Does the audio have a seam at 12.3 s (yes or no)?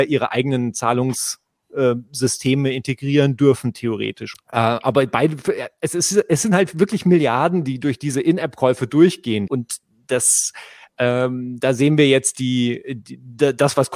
no